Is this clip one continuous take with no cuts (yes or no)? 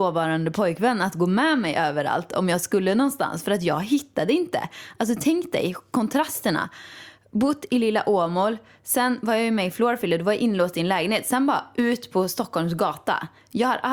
yes